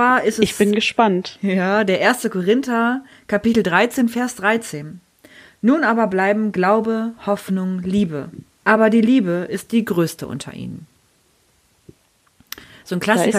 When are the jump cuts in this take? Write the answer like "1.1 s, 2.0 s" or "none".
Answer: 8.6 s